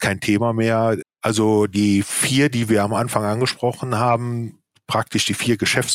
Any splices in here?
yes; 1 cut; at 1.0 s

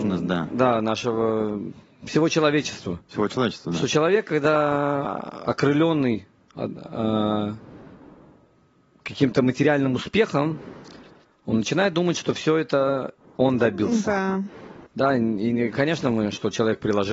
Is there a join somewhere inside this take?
yes; 1 cut; at 14.9 s

